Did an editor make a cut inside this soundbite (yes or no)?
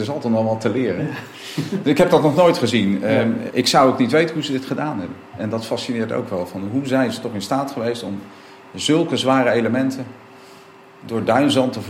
yes